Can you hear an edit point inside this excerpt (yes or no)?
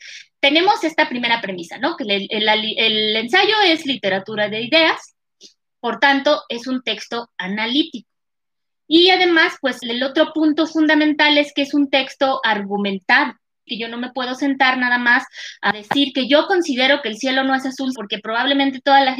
yes